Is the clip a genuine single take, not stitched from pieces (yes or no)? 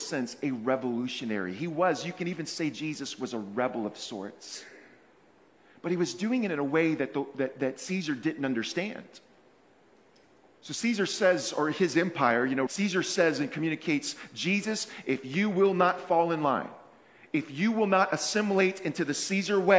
no